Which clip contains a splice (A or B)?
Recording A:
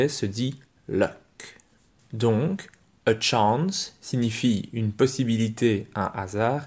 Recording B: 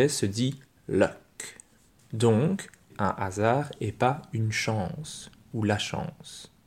B